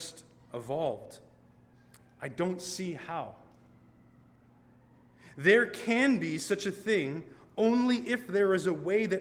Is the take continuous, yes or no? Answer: yes